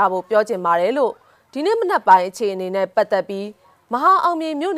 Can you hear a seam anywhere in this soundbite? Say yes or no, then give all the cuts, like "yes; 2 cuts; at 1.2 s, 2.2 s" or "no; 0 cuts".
no; 0 cuts